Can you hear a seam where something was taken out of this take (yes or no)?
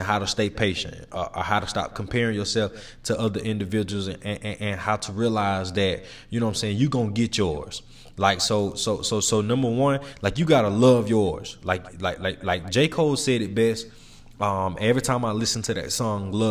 no